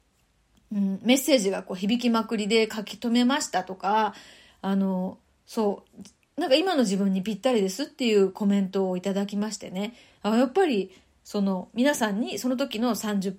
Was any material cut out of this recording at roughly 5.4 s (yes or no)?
no